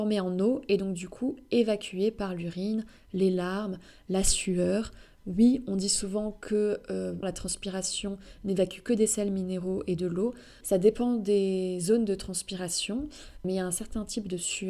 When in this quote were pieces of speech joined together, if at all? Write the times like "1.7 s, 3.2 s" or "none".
7.2 s, 10.6 s, 13.4 s